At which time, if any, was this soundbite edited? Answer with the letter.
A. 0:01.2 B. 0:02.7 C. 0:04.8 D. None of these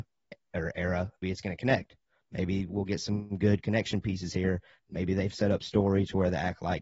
A